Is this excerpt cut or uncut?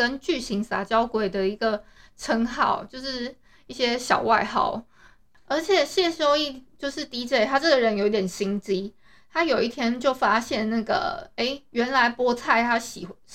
uncut